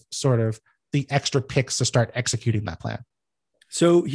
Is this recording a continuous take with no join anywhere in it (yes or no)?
yes